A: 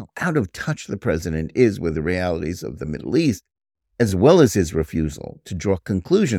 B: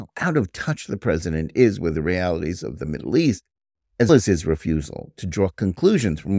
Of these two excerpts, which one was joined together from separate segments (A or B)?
B